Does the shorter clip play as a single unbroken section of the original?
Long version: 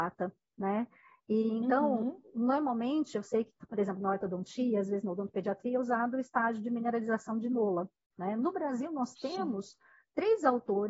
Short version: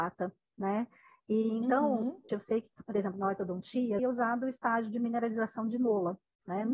no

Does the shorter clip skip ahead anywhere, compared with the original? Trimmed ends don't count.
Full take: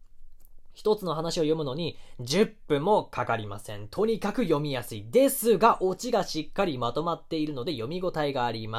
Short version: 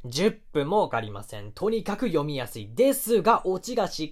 yes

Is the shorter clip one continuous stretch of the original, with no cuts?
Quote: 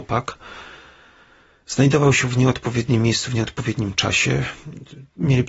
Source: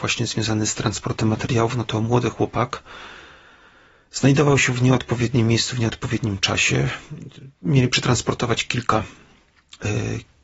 yes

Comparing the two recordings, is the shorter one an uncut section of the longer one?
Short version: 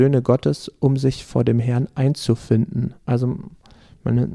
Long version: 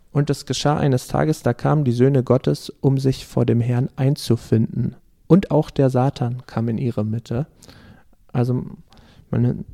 no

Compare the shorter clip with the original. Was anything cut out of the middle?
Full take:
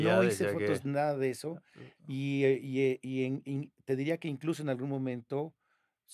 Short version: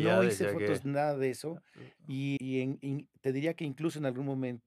yes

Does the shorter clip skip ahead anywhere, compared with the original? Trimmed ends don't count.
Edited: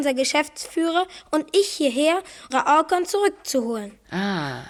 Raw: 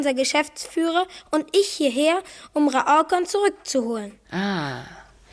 yes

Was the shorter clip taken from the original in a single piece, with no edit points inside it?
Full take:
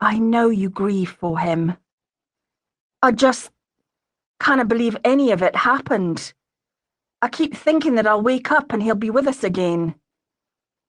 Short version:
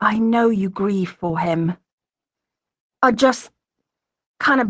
yes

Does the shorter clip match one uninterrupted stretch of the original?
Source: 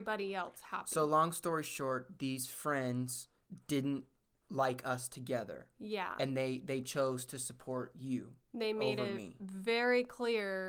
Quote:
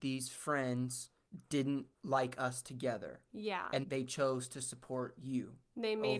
no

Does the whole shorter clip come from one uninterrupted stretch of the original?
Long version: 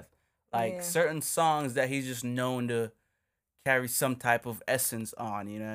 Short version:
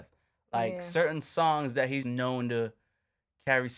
no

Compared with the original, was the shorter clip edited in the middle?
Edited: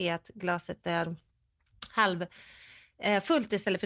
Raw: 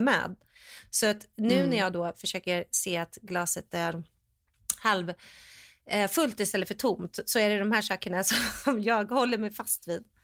no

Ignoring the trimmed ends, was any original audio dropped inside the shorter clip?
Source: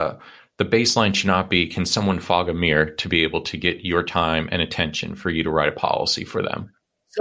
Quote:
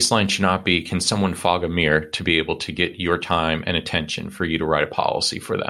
no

